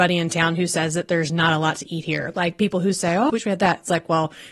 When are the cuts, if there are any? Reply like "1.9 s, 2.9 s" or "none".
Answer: 3.3 s